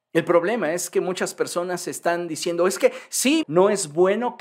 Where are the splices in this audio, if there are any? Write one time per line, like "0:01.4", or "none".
0:03.4